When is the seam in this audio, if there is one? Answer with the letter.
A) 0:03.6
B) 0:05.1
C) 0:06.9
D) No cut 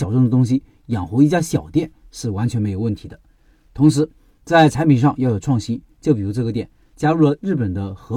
C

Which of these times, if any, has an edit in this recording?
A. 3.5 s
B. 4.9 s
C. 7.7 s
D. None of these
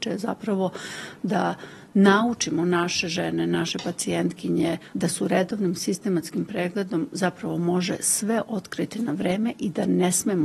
B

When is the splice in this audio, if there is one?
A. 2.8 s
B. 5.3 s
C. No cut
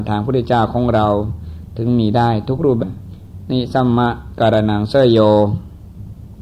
A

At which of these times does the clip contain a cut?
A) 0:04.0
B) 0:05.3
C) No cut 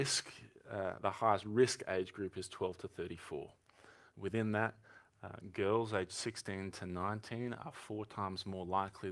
C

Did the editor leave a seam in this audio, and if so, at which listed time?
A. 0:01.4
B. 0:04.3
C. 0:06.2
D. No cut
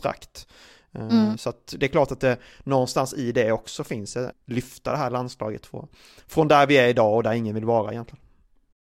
B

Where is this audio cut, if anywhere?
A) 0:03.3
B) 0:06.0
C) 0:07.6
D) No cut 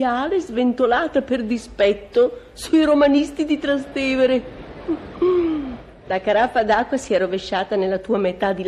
B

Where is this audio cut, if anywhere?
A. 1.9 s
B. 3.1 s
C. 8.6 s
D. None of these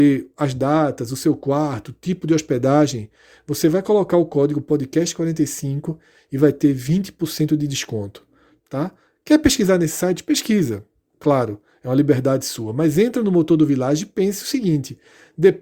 C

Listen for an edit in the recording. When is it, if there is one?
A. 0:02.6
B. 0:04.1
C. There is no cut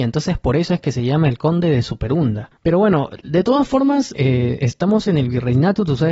B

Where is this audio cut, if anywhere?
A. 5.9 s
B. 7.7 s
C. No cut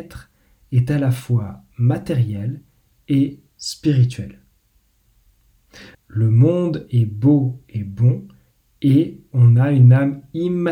A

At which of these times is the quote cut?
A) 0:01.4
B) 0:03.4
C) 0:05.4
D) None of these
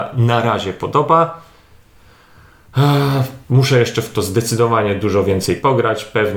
B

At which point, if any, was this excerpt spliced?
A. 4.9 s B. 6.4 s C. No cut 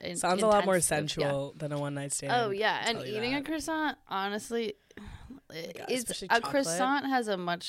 C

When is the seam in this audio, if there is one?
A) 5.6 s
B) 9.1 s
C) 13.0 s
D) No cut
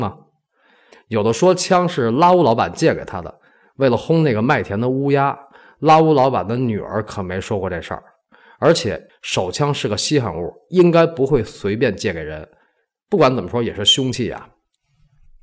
B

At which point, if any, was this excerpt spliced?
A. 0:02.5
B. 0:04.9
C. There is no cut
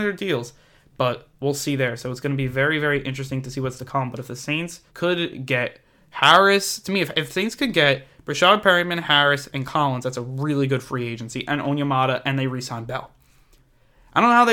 B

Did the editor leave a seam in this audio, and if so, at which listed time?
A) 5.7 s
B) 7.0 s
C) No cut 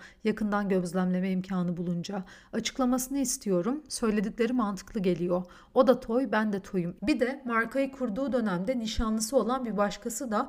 B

